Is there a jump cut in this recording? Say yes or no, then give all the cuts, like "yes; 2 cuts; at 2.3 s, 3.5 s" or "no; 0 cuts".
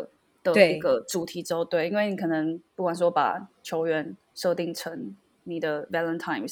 yes; 1 cut; at 2.7 s